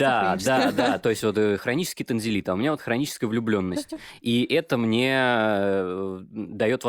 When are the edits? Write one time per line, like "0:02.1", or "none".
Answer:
none